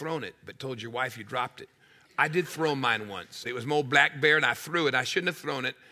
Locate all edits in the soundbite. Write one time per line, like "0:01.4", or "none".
0:03.4